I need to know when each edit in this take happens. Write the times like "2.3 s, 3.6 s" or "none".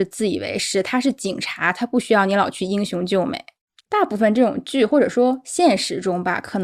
none